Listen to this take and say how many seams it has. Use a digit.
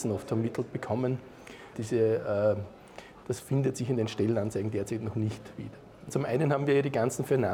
3